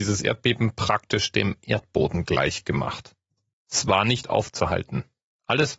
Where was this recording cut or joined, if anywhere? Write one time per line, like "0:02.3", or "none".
0:03.5